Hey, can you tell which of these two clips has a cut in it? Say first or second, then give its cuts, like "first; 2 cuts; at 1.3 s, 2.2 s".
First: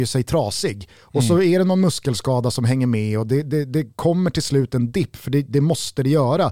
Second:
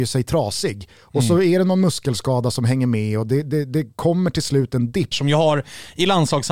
second; 1 cut; at 5.1 s